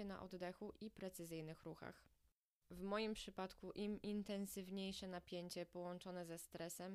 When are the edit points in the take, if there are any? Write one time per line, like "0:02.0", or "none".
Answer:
0:02.6